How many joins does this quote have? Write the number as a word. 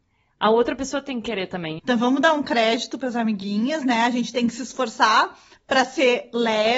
one